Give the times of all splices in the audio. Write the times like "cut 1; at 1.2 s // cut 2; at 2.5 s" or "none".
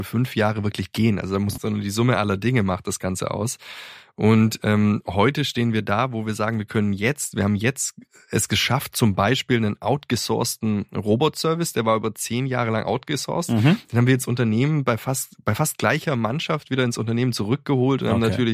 cut 1; at 1.6 s